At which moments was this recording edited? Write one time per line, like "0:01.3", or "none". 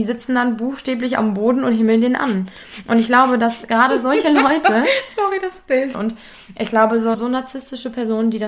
0:05.9
0:07.1